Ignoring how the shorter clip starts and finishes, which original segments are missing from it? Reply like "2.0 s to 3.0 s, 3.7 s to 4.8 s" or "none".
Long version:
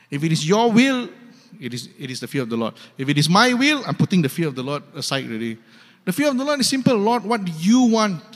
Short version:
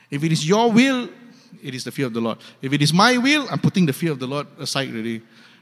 1.6 s to 1.9 s